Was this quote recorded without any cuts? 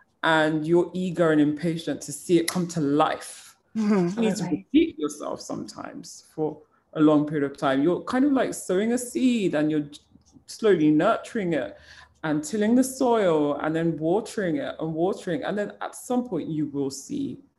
no; 1 cut; at 4.2 s

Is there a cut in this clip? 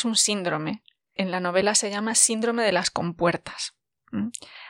no; 0 cuts

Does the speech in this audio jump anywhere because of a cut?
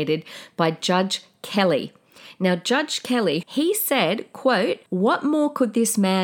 yes; 2 cuts; at 3.4 s, 4.9 s

